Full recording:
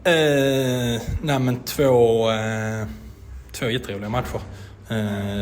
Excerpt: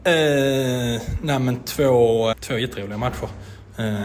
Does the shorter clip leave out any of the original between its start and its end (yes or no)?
yes